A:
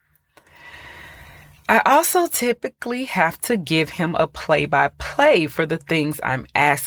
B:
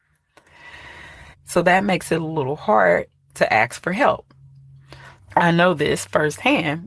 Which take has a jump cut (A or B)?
B